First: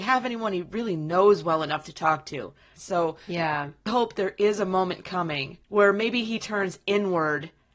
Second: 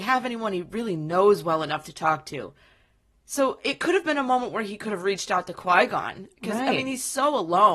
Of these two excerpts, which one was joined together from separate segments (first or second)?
first